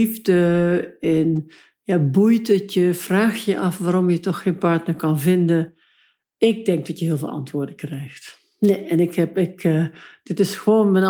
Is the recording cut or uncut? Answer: uncut